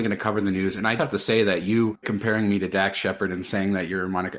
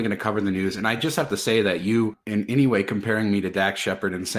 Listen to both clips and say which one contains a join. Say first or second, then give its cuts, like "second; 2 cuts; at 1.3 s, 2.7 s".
first; 2 cuts; at 1.0 s, 2.0 s